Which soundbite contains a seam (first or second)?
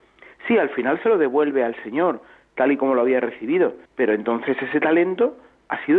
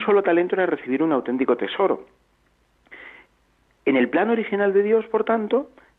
first